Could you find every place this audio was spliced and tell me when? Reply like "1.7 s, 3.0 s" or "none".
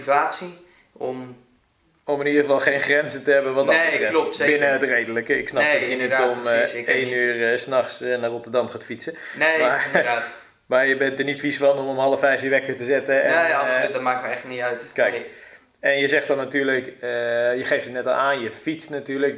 none